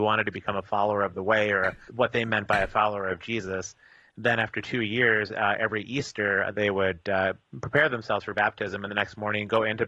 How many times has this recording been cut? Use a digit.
2